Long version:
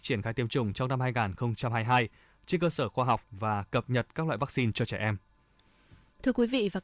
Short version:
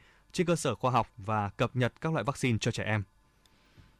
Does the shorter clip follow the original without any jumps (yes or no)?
yes